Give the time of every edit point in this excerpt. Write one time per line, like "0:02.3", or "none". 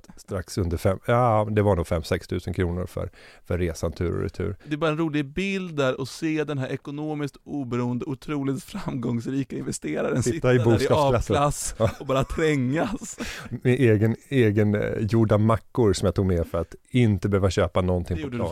none